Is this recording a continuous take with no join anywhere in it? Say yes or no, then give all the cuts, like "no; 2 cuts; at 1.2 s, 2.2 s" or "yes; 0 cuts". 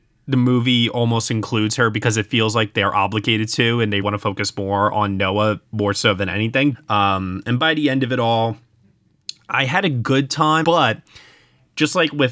no; 3 cuts; at 4.0 s, 6.7 s, 10.6 s